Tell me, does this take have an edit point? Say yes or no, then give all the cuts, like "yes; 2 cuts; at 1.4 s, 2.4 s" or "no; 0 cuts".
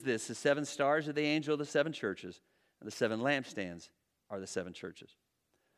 no; 0 cuts